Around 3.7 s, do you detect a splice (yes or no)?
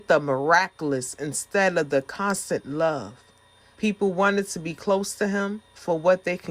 yes